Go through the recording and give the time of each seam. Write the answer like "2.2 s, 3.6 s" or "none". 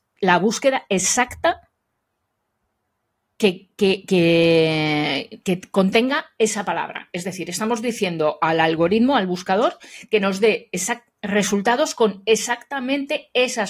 none

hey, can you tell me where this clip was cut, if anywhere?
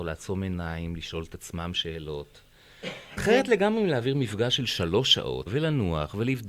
3.2 s, 5.5 s

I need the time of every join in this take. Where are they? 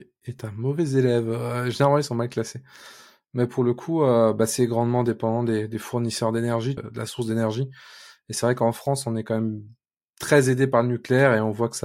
6.8 s

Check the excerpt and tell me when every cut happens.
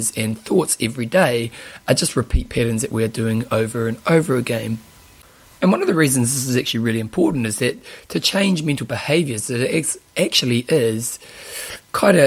none

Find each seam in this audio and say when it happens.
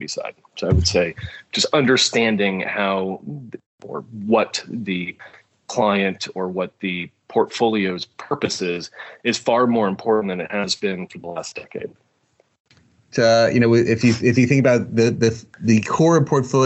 13.1 s, 15.1 s

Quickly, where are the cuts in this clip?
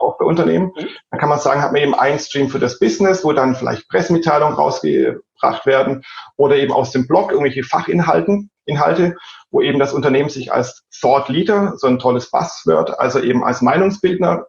none

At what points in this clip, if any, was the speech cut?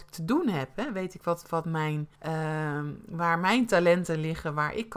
2.2 s

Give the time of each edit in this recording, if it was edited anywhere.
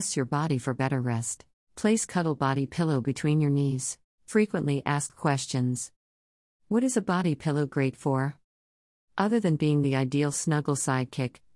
1.7 s, 4.1 s

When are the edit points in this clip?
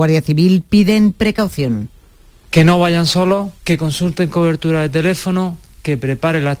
none

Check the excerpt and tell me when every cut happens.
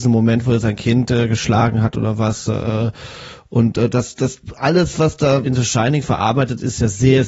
5.4 s

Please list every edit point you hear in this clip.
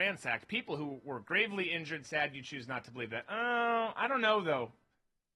2.0 s

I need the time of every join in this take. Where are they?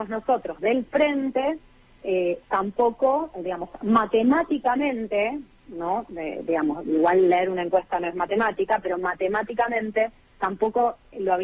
none

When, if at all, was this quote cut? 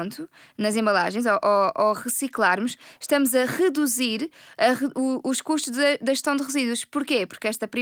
none

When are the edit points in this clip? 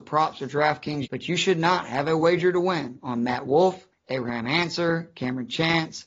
1.1 s, 3.9 s

